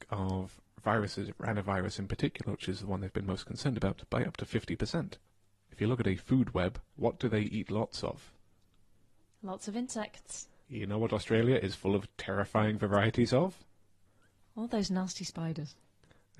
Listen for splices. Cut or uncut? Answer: cut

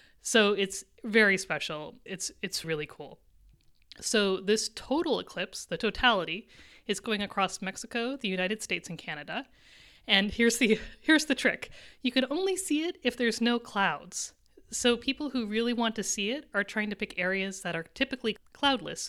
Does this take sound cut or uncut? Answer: cut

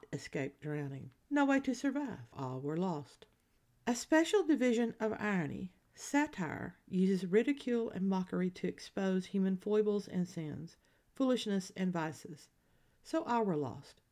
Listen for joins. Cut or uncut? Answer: cut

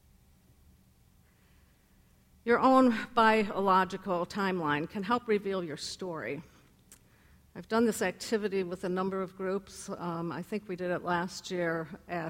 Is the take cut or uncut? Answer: uncut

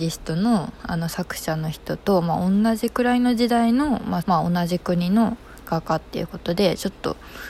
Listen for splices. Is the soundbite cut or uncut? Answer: cut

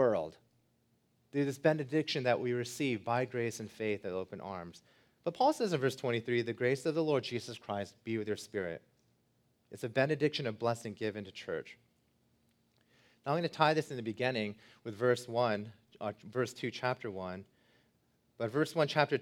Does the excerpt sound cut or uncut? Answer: uncut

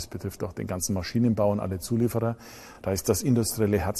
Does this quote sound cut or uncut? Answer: uncut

